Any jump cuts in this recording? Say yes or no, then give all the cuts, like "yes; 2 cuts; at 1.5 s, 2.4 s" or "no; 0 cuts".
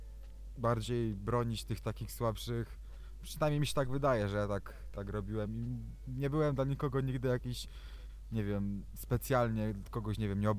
no; 0 cuts